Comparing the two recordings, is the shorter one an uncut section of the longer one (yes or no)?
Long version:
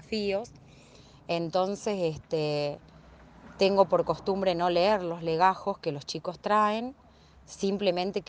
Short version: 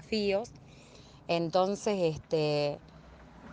yes